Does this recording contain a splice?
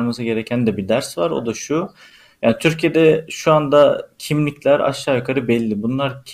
no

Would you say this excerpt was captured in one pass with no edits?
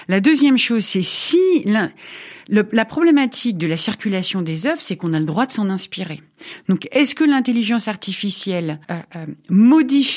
no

